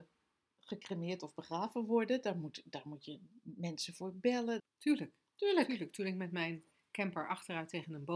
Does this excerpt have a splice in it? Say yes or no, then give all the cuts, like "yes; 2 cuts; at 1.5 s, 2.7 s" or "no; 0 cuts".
yes; 1 cut; at 4.6 s